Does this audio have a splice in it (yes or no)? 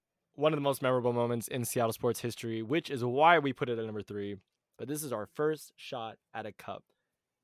yes